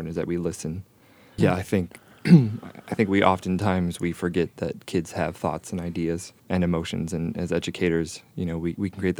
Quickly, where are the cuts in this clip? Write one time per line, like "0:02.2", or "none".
0:01.4
0:06.4